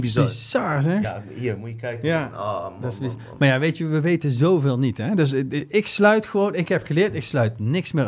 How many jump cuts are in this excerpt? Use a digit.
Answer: 0